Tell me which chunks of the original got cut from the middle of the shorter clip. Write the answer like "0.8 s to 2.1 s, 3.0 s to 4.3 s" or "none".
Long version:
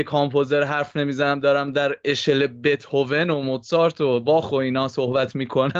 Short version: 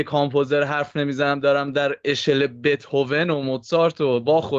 none